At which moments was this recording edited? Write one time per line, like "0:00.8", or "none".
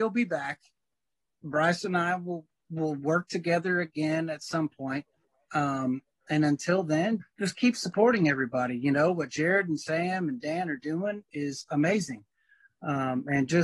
0:07.2